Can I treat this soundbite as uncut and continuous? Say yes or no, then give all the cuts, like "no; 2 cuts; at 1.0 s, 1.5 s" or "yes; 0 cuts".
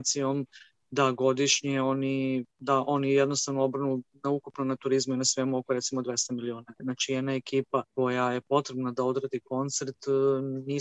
no; 2 cuts; at 6.8 s, 7.9 s